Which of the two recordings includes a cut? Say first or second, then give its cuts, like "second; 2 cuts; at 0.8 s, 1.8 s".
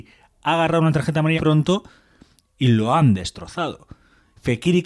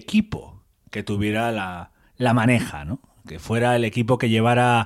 first; 1 cut; at 1.4 s